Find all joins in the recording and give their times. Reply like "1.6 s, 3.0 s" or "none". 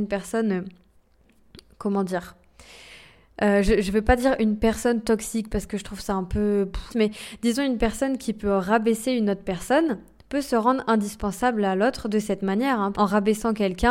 6.9 s, 12.9 s